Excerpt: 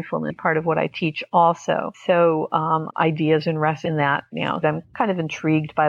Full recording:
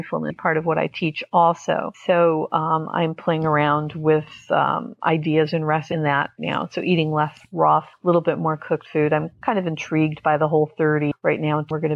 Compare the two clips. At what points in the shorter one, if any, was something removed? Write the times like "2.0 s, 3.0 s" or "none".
2.9 s, 4.6 s